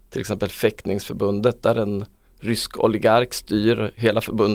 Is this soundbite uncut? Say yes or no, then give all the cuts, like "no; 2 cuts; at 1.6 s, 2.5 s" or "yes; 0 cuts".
yes; 0 cuts